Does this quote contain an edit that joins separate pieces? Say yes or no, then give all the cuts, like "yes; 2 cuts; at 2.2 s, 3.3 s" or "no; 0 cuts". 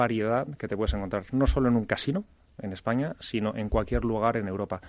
no; 0 cuts